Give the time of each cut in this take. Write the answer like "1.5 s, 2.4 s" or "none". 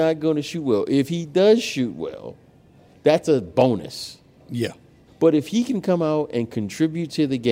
5.1 s

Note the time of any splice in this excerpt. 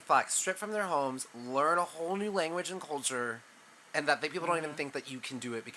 none

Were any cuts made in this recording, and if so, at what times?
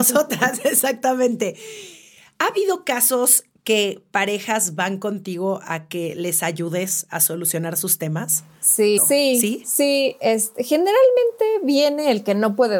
9.0 s

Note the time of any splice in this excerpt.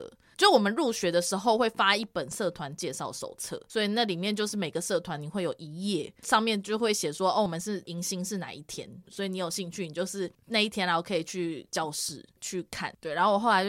none

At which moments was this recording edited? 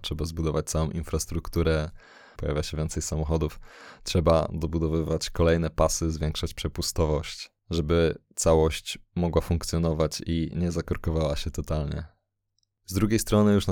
2.3 s

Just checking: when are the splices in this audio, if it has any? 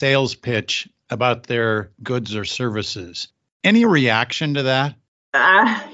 none

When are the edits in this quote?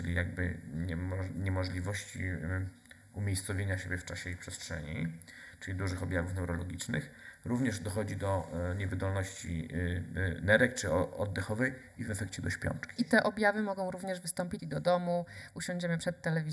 13.0 s, 14.6 s

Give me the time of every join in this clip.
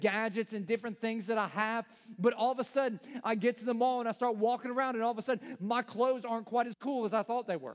none

